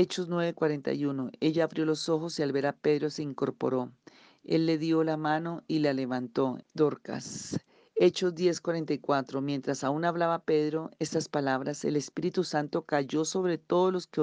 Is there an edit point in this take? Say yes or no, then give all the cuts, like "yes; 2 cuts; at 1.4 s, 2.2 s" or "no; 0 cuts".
yes; 1 cut; at 6.6 s